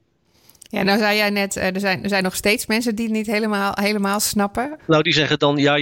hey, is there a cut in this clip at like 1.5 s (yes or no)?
no